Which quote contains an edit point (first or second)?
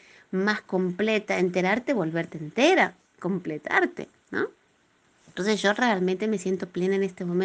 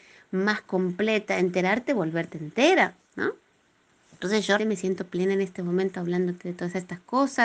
second